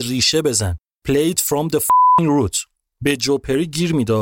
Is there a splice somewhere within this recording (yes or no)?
no